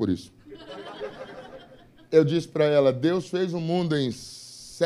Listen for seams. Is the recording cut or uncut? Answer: uncut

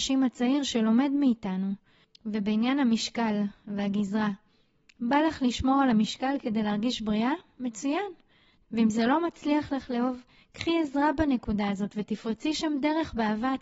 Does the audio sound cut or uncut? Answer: cut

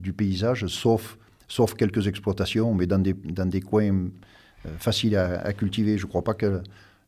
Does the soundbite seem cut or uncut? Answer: uncut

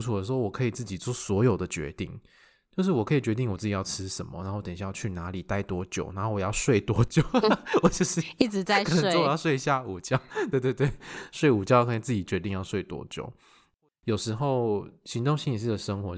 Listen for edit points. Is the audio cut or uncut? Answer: uncut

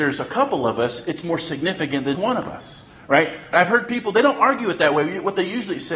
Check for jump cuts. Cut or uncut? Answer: cut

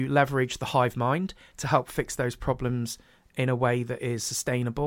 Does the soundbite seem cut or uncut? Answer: uncut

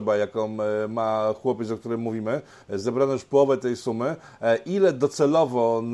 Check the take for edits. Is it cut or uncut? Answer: uncut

